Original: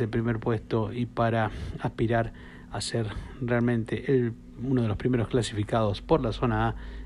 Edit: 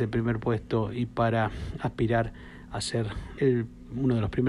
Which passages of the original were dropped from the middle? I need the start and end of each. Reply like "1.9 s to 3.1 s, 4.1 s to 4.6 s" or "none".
3.4 s to 4.0 s